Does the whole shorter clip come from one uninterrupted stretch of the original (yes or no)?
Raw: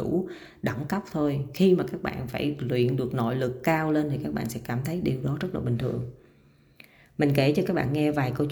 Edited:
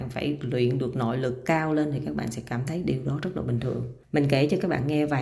no